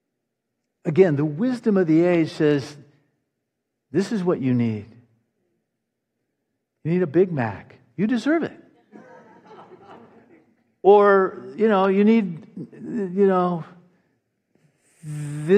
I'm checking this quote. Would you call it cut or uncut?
uncut